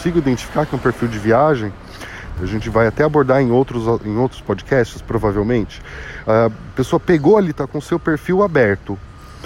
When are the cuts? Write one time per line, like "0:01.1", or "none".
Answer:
0:02.4
0:06.2
0:07.5